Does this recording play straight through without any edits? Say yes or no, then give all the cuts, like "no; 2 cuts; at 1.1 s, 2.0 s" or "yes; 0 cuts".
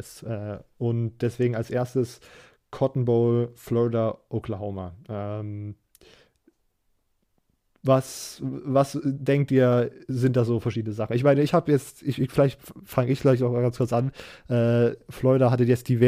yes; 0 cuts